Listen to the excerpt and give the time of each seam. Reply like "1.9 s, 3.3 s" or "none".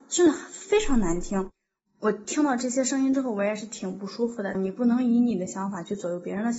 4.5 s